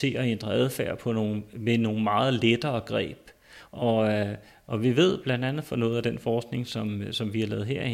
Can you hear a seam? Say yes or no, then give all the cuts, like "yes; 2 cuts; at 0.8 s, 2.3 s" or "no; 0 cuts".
yes; 1 cut; at 3.7 s